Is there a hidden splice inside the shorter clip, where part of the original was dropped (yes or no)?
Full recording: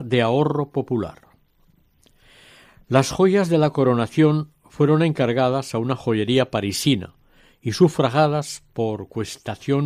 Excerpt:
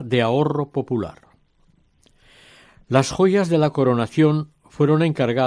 no